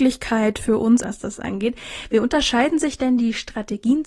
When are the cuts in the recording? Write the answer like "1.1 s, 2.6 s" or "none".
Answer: 1.0 s